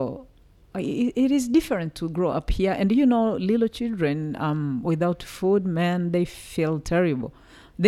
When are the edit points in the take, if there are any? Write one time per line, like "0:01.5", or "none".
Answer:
none